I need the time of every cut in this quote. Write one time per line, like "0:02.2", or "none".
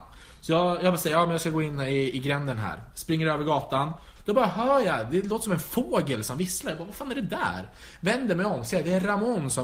0:04.2